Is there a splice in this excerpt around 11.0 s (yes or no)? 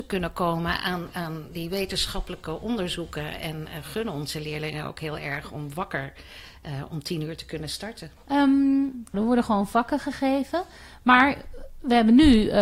no